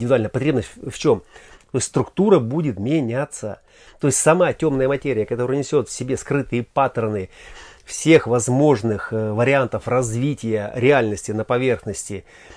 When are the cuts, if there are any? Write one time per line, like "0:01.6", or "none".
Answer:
0:01.6